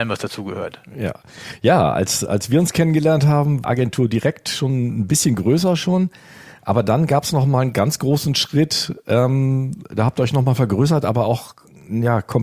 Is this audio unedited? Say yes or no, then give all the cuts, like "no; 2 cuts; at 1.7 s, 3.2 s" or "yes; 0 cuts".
no; 1 cut; at 3.6 s